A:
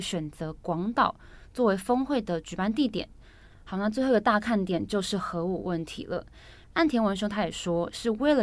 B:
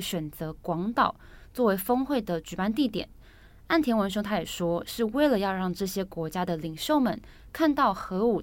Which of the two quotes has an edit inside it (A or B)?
A